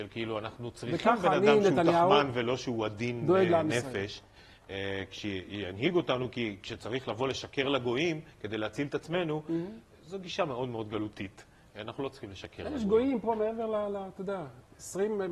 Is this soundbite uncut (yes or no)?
yes